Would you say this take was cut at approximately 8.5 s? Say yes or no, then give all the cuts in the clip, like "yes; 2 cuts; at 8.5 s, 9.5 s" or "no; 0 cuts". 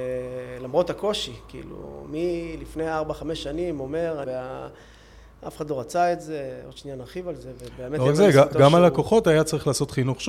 no; 1 cut; at 4.2 s